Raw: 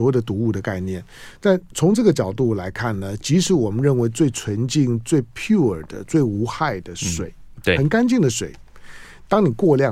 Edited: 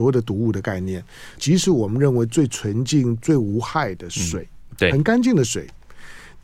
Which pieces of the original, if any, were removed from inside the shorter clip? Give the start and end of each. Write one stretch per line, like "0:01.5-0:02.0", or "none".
0:01.4-0:03.2
0:05.0-0:06.1